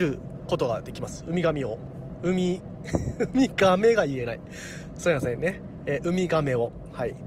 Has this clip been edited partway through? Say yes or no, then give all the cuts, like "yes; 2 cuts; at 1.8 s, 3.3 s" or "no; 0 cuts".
no; 0 cuts